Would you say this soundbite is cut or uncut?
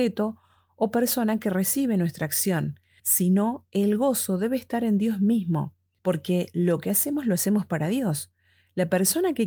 uncut